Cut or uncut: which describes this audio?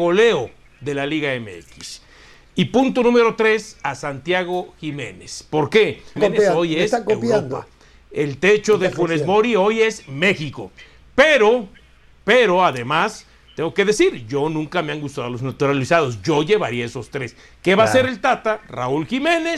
cut